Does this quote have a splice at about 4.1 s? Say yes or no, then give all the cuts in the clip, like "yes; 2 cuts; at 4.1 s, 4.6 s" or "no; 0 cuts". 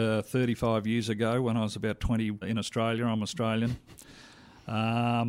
no; 1 cut; at 2.4 s